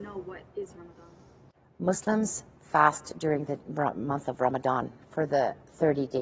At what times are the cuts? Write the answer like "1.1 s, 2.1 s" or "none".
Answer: 1.7 s